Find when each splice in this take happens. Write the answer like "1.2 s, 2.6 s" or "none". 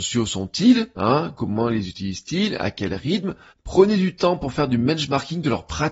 3.5 s